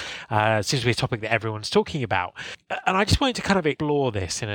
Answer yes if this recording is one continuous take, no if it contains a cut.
yes